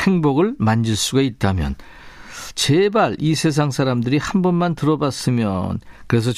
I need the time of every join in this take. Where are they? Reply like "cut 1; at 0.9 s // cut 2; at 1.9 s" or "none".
cut 1; at 2.5 s